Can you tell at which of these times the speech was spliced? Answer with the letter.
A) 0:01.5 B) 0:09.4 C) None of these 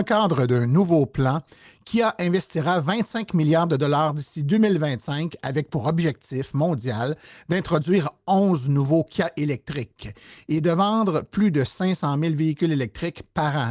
C